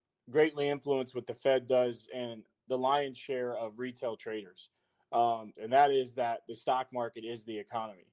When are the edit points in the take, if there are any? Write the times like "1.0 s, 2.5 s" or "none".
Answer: 5.5 s